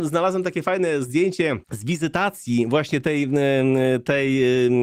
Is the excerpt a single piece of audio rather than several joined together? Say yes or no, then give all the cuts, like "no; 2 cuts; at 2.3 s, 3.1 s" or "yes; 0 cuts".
no; 1 cut; at 1.6 s